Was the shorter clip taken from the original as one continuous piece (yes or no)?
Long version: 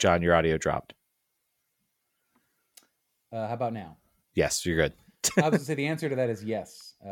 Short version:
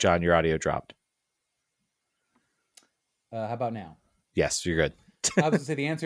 yes